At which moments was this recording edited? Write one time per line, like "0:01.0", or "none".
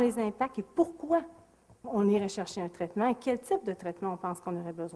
0:01.8